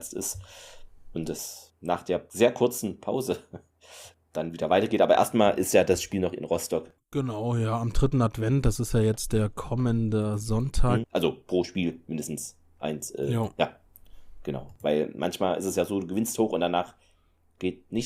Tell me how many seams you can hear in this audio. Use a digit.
2